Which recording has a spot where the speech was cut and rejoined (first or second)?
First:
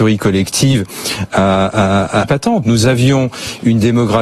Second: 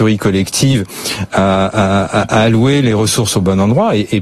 first